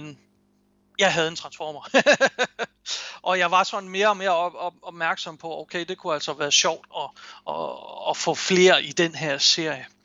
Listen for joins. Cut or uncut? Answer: uncut